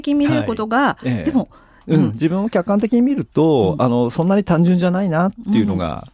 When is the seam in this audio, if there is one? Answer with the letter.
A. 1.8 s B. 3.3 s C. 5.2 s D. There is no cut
A